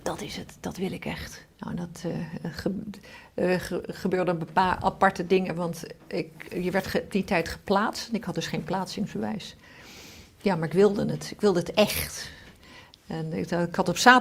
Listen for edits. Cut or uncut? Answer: cut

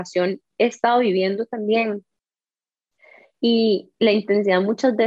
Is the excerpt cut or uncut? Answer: uncut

